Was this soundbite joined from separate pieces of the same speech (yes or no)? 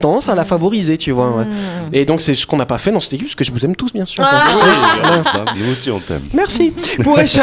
yes